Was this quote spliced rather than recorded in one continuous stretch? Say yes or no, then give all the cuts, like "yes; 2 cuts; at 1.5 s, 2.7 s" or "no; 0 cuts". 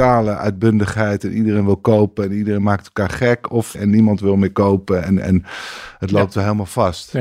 yes; 1 cut; at 3.7 s